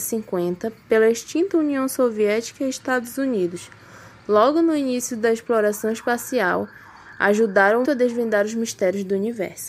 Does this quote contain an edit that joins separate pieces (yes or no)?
yes